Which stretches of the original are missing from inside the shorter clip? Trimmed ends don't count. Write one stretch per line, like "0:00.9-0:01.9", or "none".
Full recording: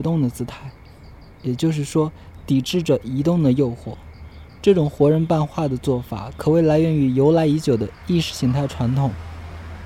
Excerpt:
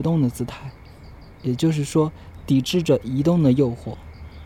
none